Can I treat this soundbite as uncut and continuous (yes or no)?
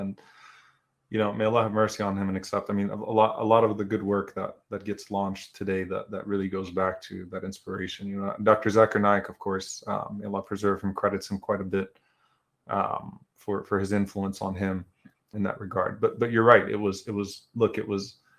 no